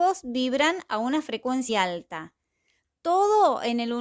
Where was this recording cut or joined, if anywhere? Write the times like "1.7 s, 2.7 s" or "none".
1.7 s